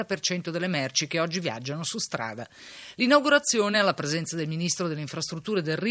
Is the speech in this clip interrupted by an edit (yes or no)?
no